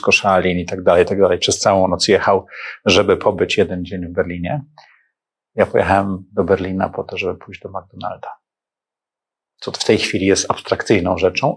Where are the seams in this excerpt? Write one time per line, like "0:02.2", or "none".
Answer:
none

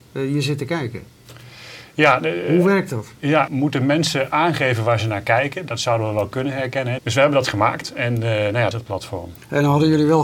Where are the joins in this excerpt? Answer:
0:03.5
0:07.0
0:08.7

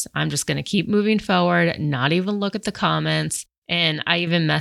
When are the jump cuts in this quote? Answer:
0:03.6

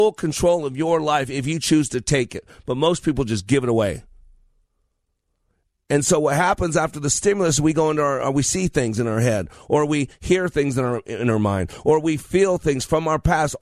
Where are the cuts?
none

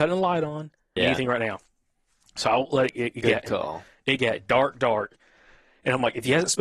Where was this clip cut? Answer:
0:01.0

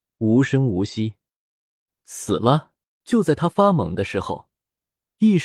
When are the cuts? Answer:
0:03.0

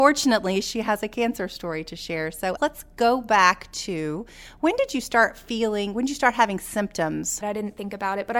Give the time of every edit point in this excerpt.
0:02.6
0:07.4

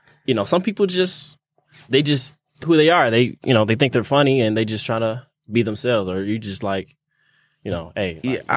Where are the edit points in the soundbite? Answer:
0:02.6

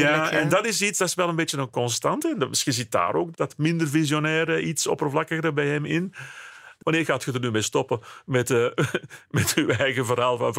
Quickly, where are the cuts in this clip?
0:06.8

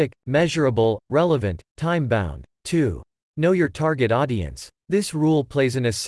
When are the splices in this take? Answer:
0:01.0
0:02.5
0:04.8

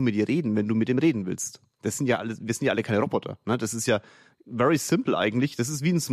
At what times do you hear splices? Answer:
none

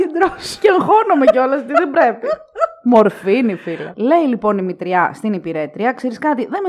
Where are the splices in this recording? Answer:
0:03.9

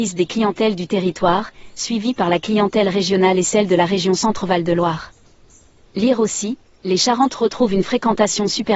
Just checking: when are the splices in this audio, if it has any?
0:05.8

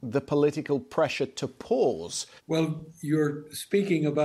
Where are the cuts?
0:02.4

